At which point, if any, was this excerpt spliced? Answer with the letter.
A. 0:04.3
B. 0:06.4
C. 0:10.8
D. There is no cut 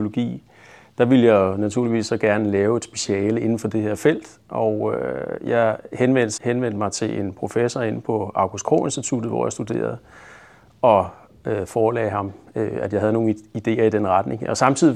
B